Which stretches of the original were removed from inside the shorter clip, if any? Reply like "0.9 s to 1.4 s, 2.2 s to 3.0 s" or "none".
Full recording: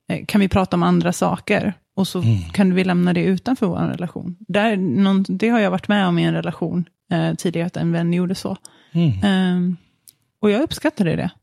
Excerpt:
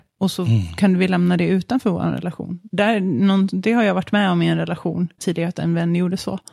6.9 s to 7.4 s